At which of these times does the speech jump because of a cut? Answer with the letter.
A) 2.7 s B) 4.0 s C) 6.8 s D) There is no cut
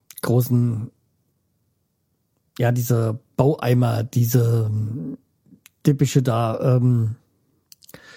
D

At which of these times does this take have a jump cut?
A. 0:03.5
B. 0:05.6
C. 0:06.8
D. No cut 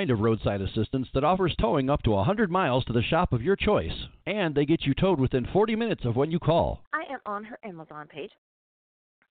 C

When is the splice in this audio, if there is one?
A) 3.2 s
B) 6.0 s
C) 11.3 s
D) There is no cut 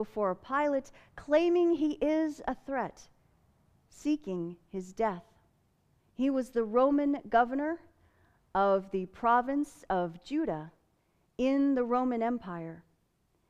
B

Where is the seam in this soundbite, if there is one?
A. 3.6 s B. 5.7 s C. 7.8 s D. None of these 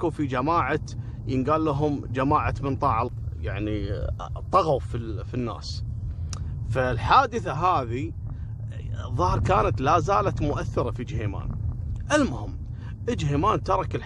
D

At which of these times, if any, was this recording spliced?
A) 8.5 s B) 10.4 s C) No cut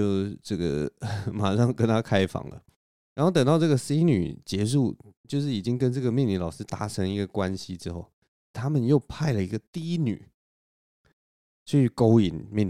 A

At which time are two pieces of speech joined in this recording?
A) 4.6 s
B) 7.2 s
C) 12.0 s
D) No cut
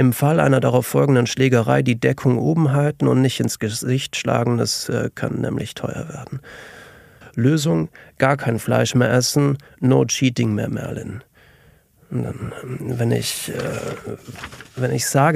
B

